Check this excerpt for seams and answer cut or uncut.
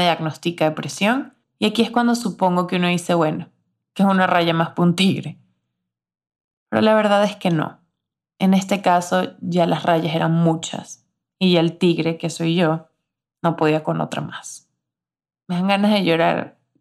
uncut